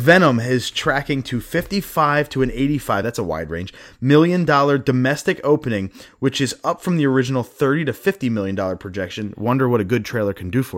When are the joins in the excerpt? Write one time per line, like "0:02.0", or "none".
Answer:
none

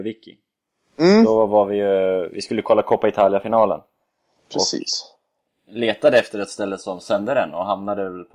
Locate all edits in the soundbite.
none

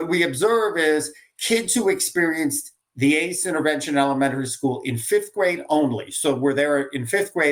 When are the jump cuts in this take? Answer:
none

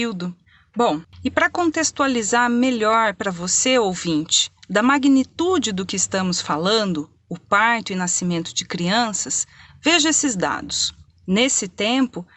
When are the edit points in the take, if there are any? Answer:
0:11.1

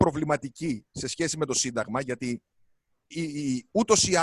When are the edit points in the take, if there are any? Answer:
0:03.1

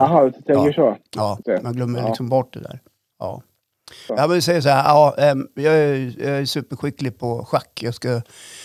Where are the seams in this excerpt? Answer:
0:01.4
0:04.1

